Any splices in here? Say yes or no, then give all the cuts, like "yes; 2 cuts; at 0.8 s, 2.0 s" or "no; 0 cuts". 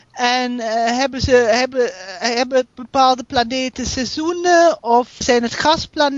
yes; 1 cut; at 5.2 s